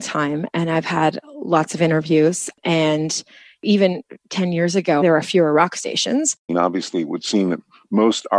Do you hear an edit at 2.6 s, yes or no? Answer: no